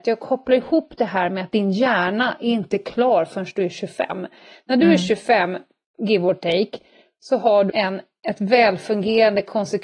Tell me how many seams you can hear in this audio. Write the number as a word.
one